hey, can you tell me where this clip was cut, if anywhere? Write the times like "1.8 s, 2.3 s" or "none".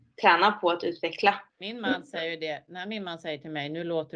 1.5 s